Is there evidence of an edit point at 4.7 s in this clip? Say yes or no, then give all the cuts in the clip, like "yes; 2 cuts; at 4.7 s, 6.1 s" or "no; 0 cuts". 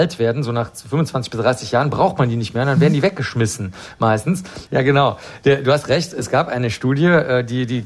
yes; 1 cut; at 4.7 s